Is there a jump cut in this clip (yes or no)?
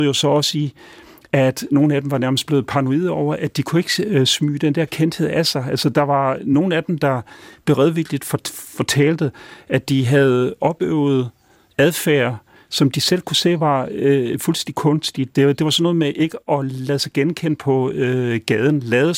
no